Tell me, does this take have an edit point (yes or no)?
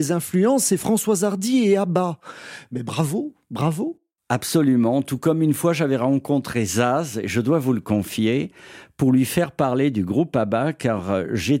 no